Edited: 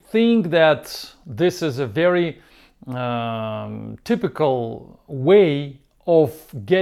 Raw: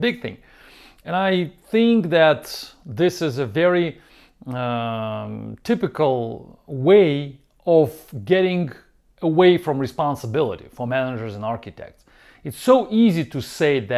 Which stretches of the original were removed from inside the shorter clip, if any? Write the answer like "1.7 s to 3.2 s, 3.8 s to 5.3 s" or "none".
none